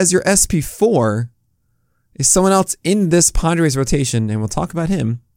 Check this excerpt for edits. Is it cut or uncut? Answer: uncut